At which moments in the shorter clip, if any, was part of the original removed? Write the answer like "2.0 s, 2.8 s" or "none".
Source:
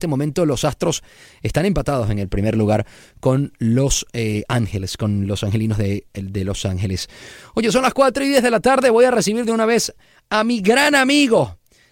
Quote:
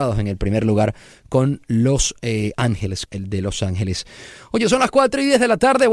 3.1 s